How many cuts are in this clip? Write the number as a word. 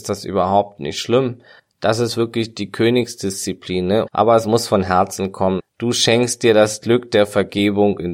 two